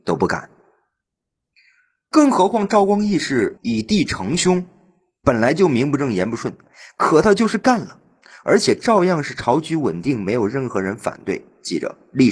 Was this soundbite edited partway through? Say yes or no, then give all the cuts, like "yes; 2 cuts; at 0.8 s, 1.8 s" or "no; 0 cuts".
no; 0 cuts